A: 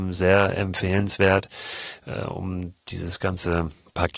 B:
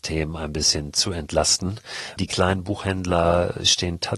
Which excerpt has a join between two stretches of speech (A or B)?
B